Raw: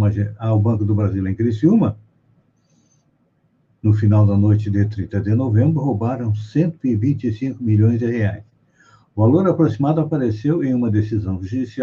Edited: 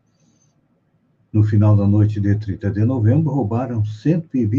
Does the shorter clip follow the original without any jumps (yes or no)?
yes